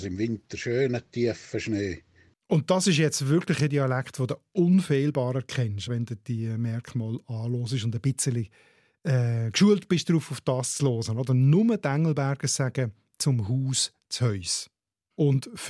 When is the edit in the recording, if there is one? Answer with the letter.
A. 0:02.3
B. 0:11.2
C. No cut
A